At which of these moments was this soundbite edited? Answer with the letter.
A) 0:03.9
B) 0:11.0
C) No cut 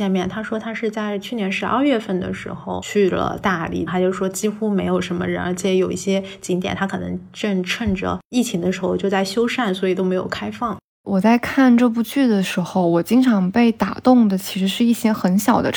A